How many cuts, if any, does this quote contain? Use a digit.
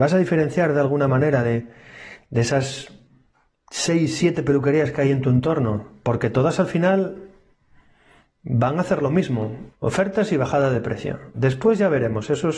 2